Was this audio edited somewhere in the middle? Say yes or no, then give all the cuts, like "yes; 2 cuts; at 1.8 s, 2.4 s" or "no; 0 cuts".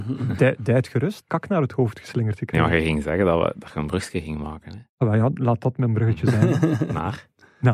yes; 1 cut; at 1.2 s